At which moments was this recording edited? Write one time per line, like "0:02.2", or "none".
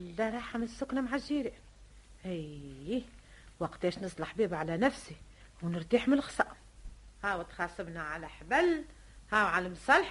none